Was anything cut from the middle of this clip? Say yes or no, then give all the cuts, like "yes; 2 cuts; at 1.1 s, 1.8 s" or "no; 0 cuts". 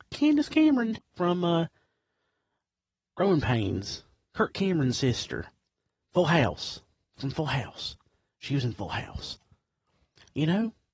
yes; 2 cuts; at 0.9 s, 6.0 s